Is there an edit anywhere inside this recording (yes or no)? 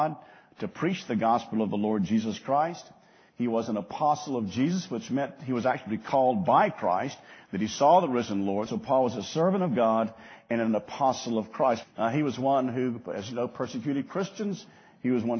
yes